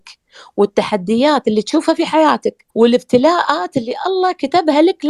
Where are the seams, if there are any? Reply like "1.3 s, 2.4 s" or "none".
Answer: 2.7 s